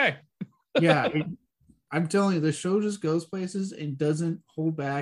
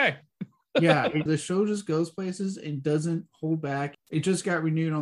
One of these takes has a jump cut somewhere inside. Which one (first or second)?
second